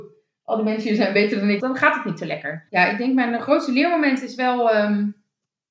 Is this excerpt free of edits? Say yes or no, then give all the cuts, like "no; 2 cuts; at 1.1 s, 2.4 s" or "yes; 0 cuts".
no; 2 cuts; at 1.6 s, 2.7 s